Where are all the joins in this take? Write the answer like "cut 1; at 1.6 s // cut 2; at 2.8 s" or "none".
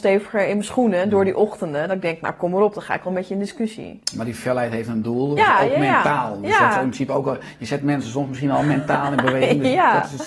cut 1; at 5.4 s